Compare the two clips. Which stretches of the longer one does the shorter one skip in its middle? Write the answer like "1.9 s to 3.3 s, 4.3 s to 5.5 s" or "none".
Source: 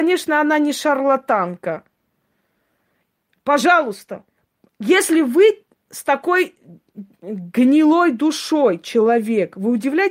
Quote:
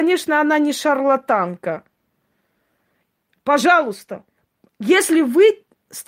none